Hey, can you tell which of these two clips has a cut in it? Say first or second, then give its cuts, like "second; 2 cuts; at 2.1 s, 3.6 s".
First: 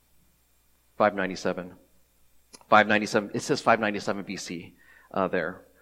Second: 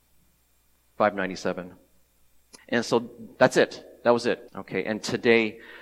second; 2 cuts; at 2.6 s, 4.5 s